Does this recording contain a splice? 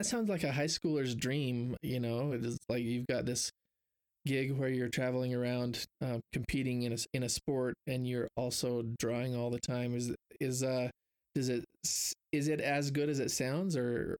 no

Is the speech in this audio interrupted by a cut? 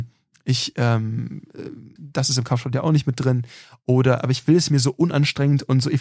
yes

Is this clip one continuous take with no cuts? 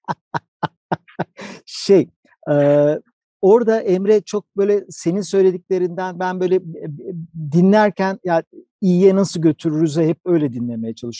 yes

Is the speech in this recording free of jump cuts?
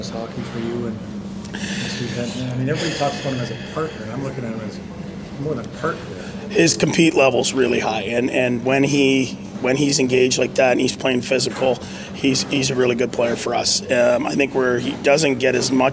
yes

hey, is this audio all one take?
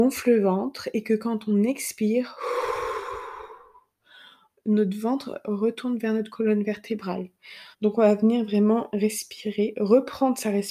no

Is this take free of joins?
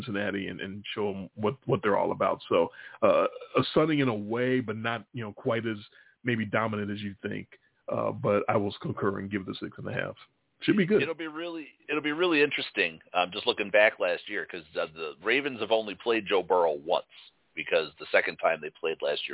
yes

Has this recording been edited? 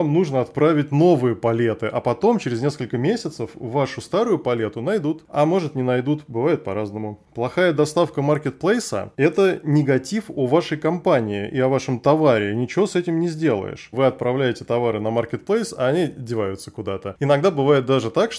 yes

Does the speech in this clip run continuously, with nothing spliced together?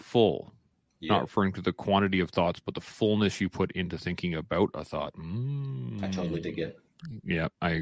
yes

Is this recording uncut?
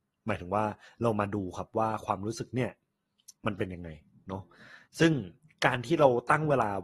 no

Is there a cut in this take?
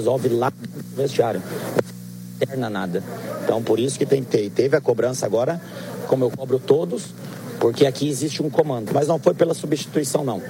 yes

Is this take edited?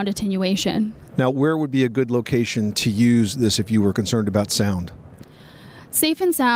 yes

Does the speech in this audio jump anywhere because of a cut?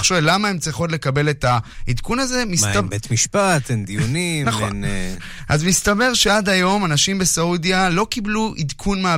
no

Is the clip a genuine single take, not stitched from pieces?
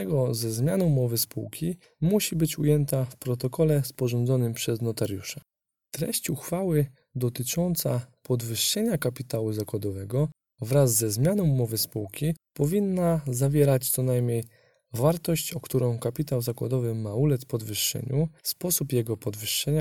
no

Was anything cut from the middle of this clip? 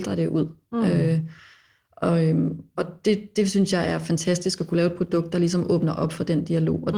no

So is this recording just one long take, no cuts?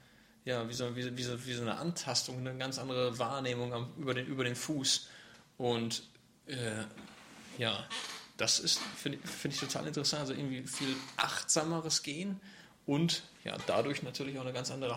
yes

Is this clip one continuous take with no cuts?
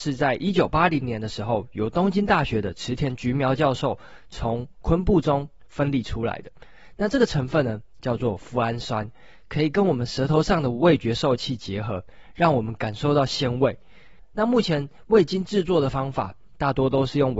no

